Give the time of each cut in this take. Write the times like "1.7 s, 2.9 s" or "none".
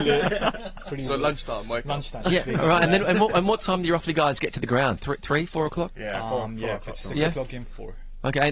2.2 s